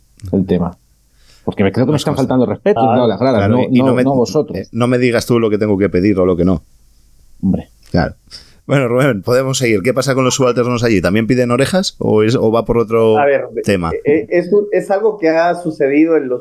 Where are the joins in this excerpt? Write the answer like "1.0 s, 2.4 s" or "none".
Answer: 2.8 s, 9.2 s